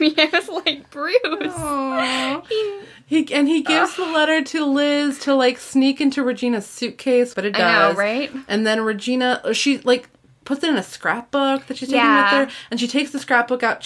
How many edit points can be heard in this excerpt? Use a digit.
1